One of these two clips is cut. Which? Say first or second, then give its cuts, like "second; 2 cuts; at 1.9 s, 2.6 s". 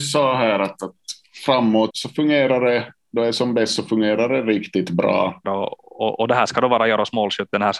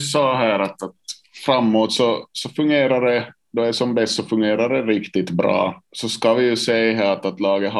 first; 2 cuts; at 1.9 s, 5.4 s